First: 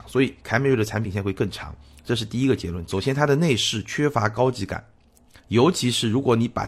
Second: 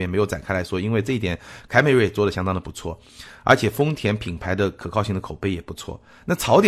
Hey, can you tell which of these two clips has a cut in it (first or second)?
first